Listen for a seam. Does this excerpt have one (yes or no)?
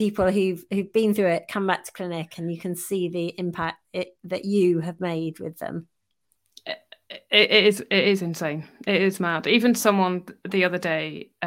no